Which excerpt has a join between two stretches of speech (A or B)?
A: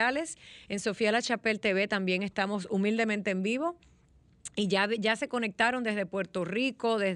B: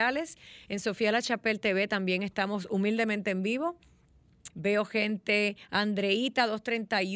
B